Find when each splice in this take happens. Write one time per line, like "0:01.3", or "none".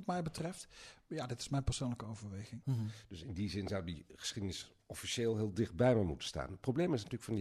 0:02.6